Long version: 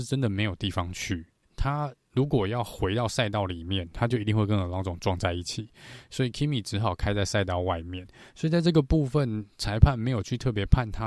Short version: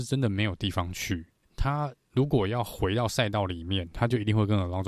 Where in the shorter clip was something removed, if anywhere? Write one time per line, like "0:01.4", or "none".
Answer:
none